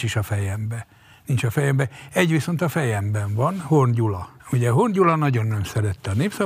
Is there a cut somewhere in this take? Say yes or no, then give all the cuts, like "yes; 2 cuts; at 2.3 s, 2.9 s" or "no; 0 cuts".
yes; 1 cut; at 4.4 s